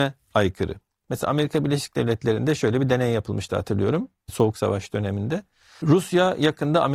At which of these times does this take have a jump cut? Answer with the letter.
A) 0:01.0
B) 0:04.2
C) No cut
A